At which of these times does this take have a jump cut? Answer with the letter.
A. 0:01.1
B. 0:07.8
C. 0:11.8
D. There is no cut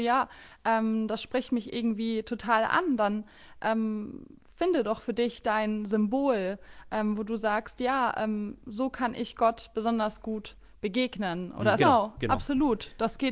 C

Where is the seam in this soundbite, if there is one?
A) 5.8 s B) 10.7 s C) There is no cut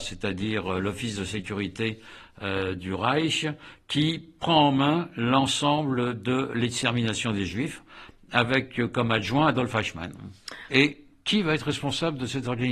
B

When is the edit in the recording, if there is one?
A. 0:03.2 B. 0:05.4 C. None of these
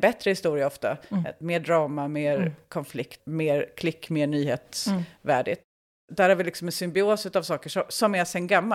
A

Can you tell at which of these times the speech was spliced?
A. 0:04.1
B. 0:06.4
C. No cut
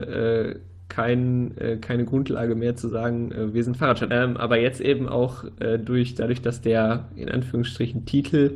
A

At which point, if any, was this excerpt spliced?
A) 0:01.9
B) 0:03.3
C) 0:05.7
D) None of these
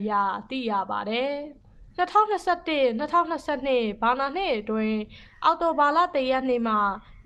A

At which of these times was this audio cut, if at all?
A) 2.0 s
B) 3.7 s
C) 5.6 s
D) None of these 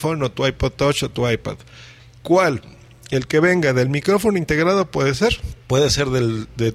C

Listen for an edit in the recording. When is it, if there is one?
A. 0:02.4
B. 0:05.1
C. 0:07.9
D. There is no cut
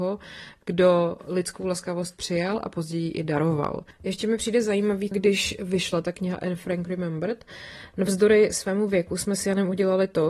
B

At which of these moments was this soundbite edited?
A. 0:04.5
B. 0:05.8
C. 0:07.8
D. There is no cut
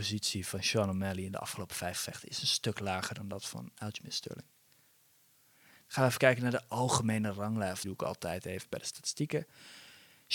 C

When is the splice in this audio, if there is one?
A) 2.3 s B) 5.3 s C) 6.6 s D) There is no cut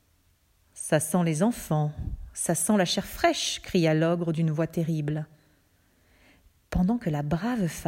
D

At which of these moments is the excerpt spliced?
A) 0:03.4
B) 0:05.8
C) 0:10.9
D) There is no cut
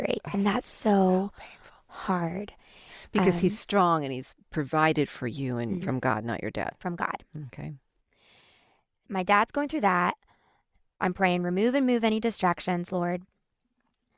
B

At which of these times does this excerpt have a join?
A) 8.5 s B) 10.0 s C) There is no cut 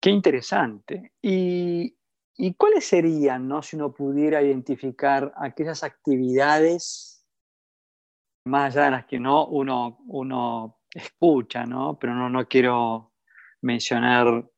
A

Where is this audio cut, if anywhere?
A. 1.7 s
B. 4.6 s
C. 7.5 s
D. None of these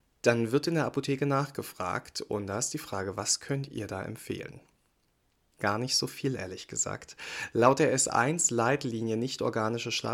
D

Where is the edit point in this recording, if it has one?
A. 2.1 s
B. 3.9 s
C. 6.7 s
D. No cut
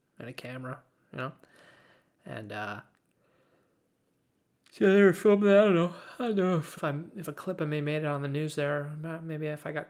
C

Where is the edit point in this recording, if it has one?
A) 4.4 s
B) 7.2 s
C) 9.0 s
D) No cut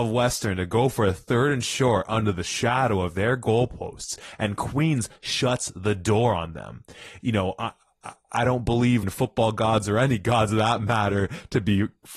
C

